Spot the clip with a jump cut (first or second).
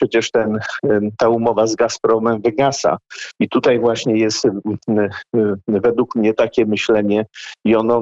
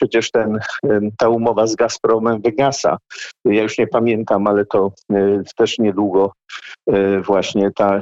first